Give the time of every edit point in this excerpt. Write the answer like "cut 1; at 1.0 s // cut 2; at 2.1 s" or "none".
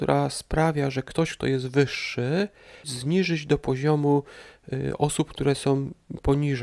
cut 1; at 2.8 s

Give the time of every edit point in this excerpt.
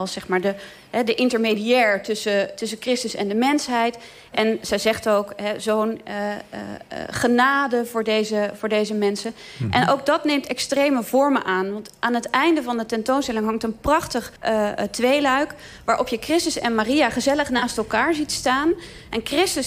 cut 1; at 14.4 s

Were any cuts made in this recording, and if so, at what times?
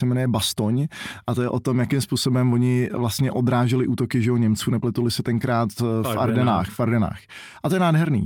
none

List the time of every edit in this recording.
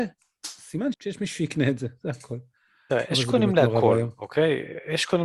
cut 1; at 0.9 s

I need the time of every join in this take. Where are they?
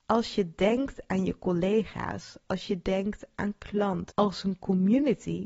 cut 1; at 4.1 s

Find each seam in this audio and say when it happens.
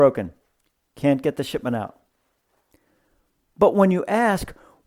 none

